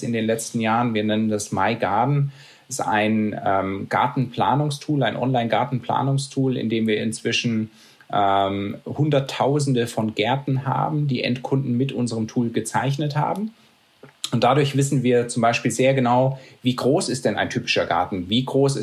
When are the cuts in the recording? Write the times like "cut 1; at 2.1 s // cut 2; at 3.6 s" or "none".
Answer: none